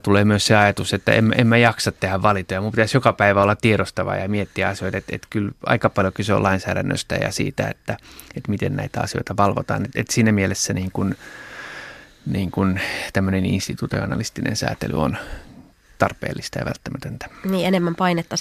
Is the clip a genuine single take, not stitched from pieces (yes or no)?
yes